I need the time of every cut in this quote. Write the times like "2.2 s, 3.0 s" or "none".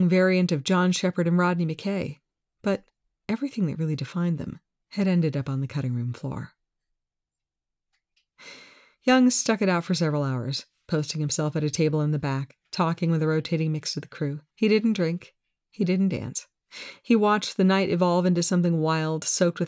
14.5 s